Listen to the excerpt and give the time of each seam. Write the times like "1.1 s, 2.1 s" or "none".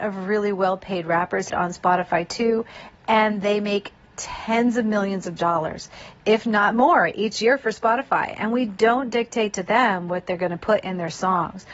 1.5 s